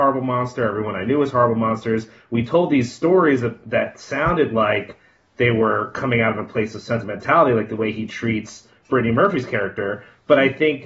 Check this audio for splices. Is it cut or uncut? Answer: uncut